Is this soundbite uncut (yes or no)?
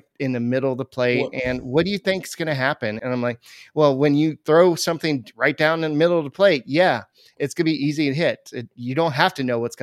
no